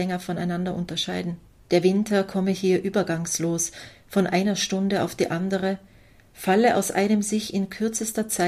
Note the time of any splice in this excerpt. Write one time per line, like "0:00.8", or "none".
0:01.6